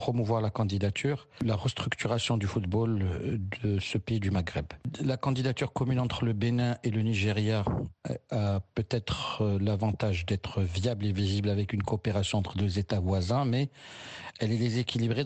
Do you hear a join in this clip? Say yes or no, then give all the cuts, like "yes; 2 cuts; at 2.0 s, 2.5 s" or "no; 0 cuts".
no; 0 cuts